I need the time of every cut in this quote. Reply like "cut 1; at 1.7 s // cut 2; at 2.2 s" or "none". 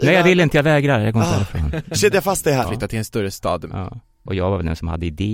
cut 1; at 2.6 s // cut 2; at 4.3 s